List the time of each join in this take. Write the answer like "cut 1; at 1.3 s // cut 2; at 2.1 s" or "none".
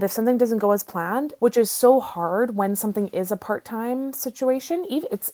cut 1; at 1.4 s